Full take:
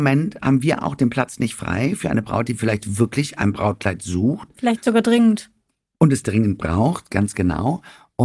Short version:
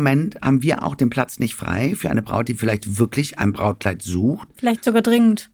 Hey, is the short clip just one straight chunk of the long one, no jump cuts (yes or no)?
yes